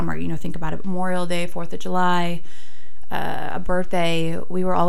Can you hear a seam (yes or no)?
no